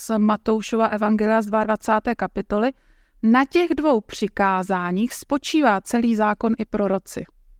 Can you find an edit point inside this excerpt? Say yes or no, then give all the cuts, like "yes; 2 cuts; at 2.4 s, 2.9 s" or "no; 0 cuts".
no; 0 cuts